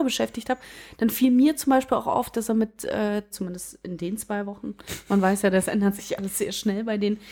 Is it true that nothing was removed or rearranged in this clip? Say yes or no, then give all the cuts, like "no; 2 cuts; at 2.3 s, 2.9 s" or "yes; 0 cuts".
no; 1 cut; at 3.3 s